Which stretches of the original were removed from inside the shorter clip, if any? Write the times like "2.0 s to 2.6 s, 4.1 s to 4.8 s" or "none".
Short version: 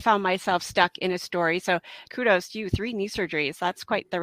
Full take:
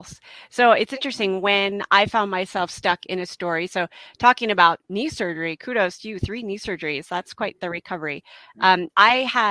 4.2 s to 5.6 s